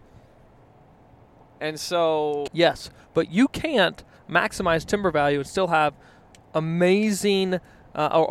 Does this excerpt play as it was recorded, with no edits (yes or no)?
no